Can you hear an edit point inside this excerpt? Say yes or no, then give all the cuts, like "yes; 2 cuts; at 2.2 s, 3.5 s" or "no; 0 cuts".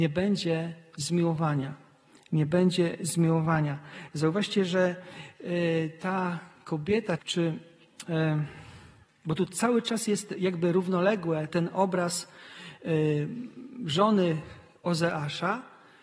yes; 2 cuts; at 7.2 s, 11.5 s